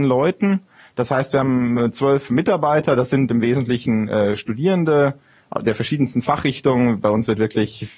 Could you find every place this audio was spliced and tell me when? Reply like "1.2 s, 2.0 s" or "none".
none